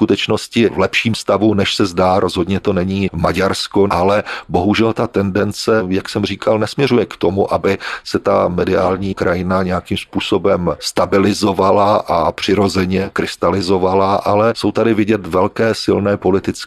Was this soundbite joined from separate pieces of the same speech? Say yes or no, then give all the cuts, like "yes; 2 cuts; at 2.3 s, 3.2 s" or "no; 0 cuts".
yes; 1 cut; at 3.9 s